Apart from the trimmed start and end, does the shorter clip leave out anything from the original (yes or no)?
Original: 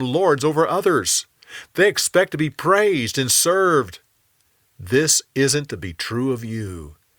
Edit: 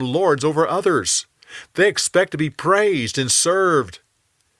no